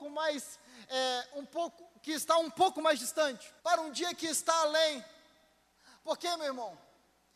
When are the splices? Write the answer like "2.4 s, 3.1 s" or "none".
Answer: 3.6 s

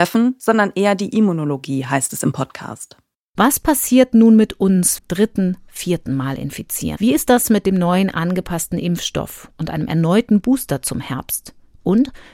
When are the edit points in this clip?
5.0 s, 7.0 s

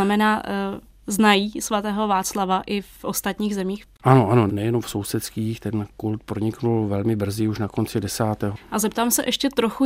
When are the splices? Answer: 8.6 s

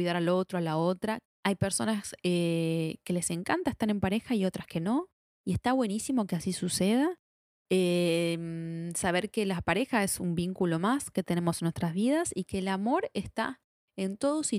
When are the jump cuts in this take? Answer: 1.2 s

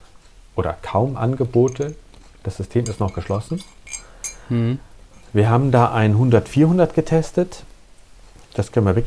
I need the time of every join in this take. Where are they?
none

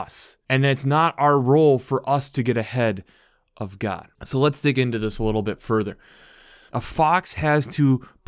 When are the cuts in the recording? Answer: 6.7 s

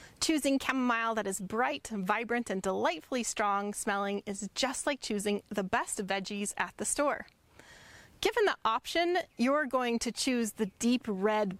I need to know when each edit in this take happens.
none

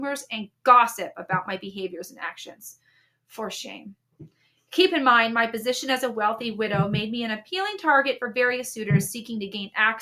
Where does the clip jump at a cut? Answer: none

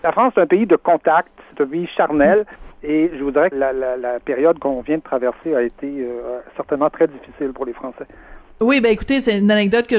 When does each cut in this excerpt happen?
3.5 s

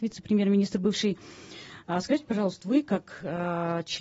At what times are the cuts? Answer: 2.6 s

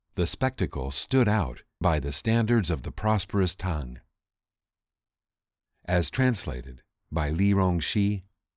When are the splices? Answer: 1.8 s

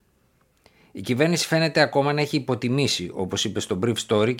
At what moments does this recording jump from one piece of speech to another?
none

